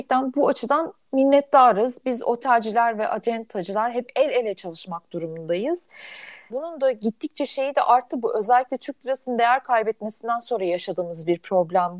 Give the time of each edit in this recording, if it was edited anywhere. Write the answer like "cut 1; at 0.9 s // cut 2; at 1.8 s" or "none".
cut 1; at 6.5 s